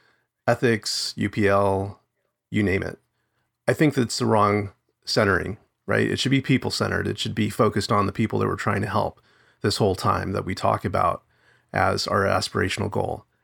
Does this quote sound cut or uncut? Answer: uncut